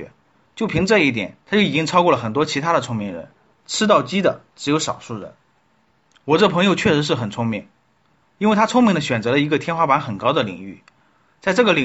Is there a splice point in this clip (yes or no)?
yes